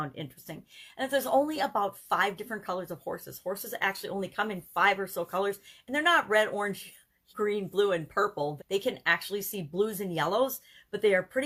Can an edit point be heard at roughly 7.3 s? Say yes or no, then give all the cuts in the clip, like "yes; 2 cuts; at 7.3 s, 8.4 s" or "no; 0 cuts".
yes; 2 cuts; at 7.3 s, 8.6 s